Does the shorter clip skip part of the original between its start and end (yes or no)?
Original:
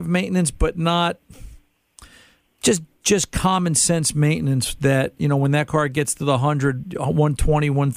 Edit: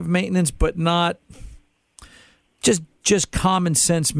no